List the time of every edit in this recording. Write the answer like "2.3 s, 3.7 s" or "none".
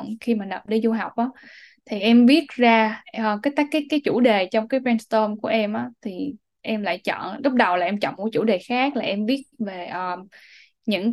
none

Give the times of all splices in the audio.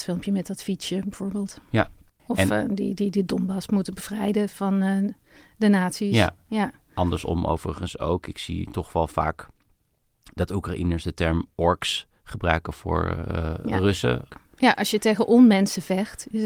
2.2 s, 14.3 s

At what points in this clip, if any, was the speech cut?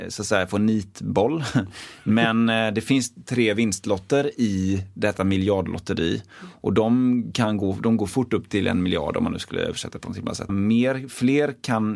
10.5 s

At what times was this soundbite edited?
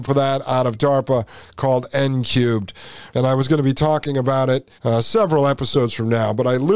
3.1 s, 4.8 s

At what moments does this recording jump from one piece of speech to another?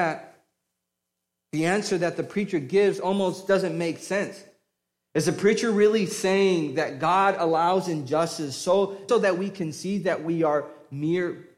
9.1 s

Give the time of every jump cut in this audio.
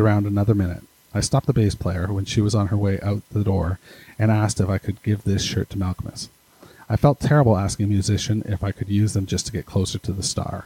none

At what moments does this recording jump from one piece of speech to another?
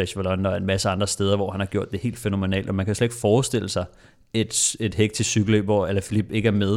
none

